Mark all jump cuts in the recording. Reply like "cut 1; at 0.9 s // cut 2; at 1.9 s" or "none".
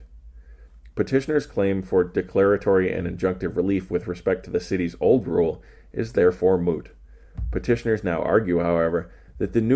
none